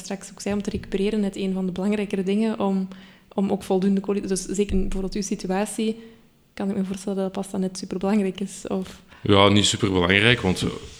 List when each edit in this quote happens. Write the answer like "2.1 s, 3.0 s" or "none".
4.7 s